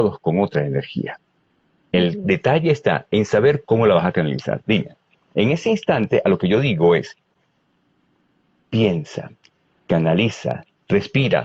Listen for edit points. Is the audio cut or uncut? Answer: cut